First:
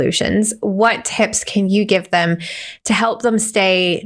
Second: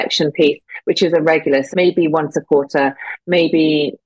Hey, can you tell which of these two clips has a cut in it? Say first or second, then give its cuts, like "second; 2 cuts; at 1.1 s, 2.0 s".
second; 1 cut; at 1.7 s